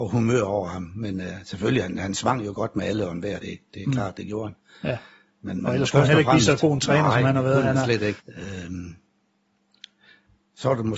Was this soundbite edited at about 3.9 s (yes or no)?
no